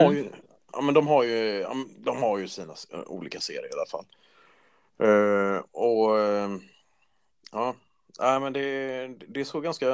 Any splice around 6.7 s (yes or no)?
no